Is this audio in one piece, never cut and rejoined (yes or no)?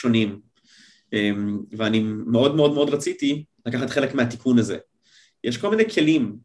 yes